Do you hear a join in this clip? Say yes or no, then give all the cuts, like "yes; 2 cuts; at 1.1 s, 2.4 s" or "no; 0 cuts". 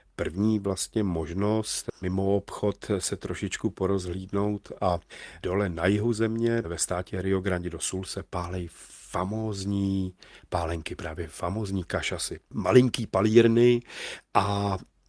yes; 1 cut; at 12.5 s